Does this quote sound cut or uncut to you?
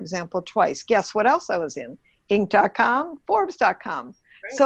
uncut